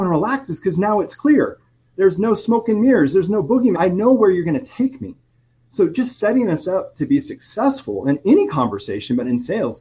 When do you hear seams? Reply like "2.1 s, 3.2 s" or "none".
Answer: 3.7 s